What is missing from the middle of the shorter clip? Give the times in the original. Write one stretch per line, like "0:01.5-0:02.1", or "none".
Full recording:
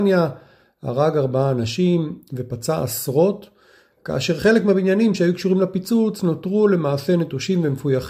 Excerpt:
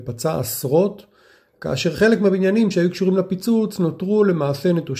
none